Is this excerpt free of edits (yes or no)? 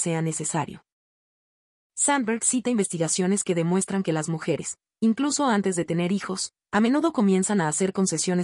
yes